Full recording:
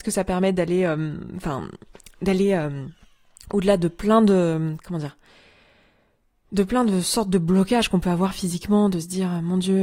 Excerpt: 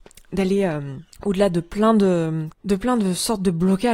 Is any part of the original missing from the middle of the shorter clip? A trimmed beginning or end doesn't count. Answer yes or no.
yes